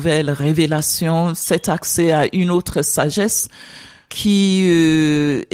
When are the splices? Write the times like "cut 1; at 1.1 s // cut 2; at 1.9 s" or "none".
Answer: none